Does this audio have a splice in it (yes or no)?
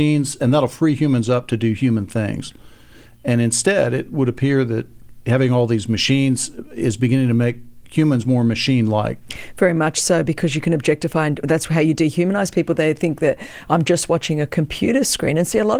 no